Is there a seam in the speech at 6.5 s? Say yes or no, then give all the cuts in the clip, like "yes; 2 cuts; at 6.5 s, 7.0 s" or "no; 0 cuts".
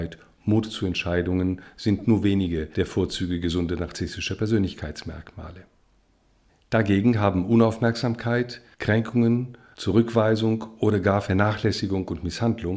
no; 0 cuts